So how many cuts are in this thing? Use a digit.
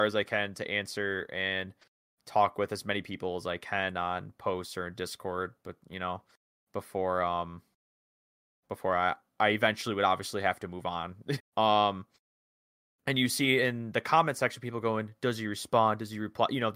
1